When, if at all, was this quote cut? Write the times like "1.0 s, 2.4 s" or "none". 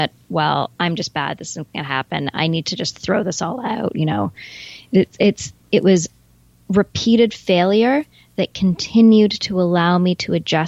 none